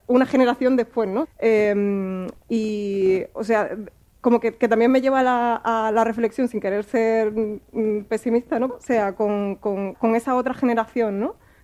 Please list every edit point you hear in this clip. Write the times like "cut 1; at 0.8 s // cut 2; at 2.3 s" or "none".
cut 1; at 1.2 s // cut 2; at 8.7 s // cut 3; at 9.9 s